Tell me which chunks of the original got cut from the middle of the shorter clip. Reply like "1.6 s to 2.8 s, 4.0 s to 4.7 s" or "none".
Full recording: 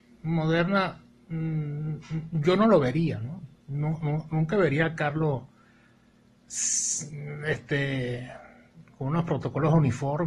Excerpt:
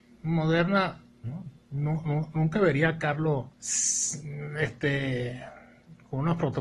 1.2 s to 3.2 s, 5.5 s to 6.4 s